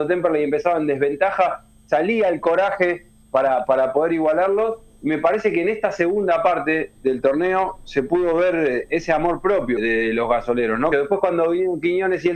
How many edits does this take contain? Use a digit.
2